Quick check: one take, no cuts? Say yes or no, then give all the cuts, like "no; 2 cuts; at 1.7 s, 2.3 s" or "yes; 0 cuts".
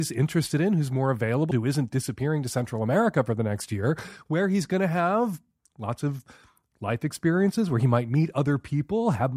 no; 1 cut; at 1.5 s